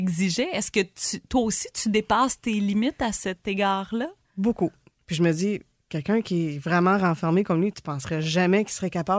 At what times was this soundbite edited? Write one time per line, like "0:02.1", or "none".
0:04.9